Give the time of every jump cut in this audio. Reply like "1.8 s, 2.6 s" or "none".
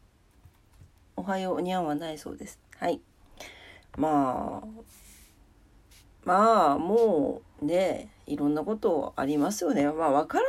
3.8 s, 7.5 s